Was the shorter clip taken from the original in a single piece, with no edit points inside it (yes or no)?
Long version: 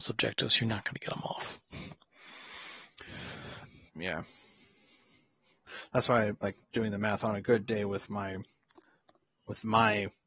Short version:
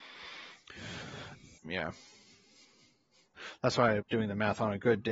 no